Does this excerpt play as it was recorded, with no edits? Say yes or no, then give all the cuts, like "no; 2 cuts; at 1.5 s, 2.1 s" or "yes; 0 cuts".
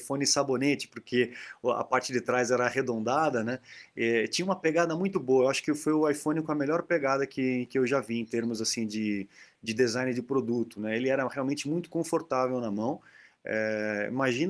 yes; 0 cuts